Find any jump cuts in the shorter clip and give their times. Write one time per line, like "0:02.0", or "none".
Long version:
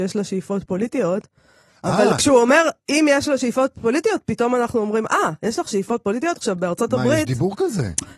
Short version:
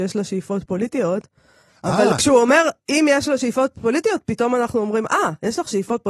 none